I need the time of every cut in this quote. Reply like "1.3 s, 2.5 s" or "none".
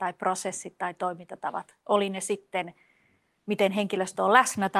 none